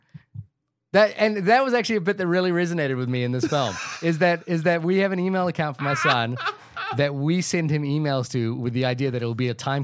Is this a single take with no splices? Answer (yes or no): yes